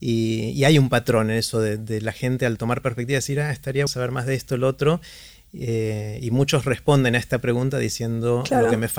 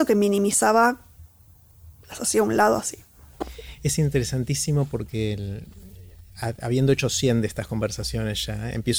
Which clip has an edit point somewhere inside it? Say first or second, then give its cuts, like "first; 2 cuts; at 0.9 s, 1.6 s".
first; 1 cut; at 3.9 s